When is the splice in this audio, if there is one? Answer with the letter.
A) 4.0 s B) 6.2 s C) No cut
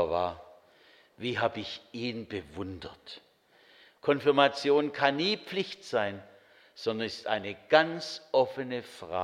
A